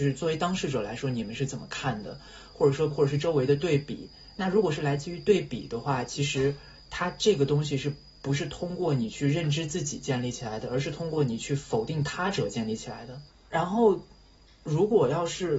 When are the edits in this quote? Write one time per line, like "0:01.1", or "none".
0:02.9
0:13.3